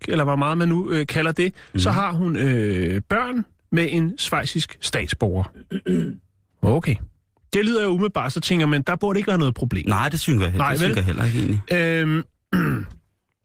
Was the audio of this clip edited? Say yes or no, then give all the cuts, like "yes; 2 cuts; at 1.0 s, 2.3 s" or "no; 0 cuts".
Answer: no; 0 cuts